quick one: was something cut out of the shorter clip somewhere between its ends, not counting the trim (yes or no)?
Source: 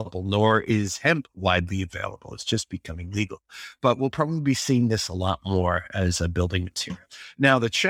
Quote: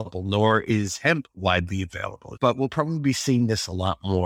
yes